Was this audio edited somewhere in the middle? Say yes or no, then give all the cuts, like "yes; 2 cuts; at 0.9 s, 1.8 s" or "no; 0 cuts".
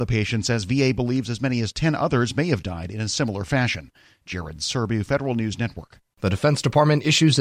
no; 0 cuts